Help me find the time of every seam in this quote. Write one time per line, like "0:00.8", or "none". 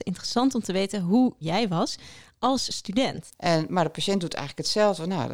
0:03.3